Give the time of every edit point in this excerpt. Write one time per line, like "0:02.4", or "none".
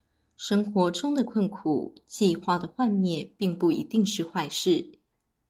none

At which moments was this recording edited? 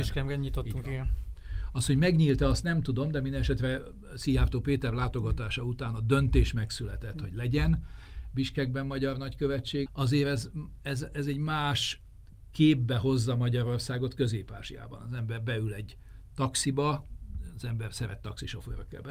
0:09.9

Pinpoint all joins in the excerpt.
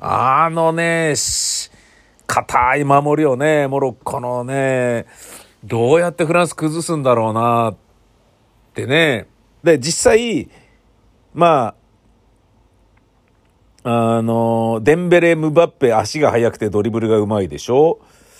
0:09.6

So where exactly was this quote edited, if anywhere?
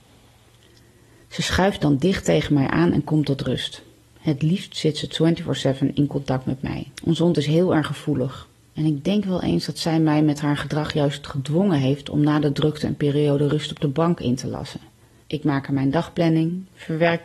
0:06.9
0:15.2

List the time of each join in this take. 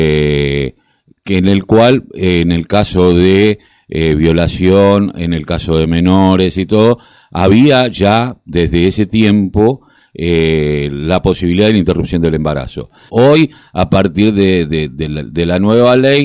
0:13.1

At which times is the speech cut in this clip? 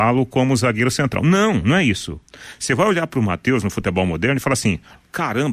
none

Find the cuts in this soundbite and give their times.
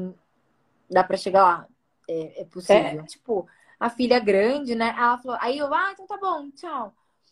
0:03.1

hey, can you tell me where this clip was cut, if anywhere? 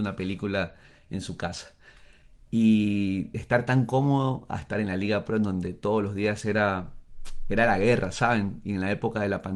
none

